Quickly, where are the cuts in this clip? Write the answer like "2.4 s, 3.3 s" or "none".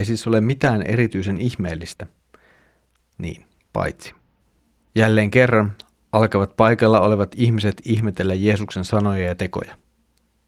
3.1 s